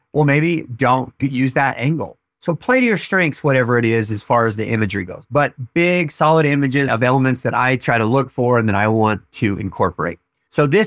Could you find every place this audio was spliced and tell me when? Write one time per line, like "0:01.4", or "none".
0:06.9